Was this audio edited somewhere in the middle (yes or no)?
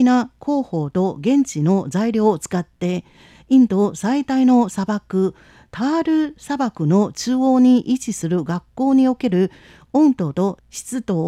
no